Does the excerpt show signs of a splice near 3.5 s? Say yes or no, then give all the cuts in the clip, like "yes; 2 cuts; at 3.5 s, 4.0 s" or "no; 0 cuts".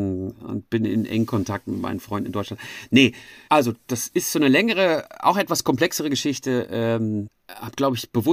yes; 1 cut; at 3.5 s